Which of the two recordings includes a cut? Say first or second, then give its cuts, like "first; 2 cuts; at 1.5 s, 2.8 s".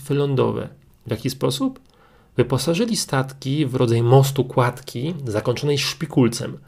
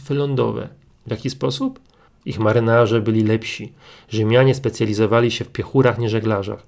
second; 1 cut; at 2.1 s